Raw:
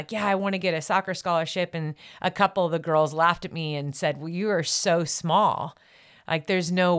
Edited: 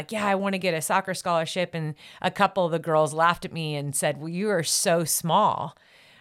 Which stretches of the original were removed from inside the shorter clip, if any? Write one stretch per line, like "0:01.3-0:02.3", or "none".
none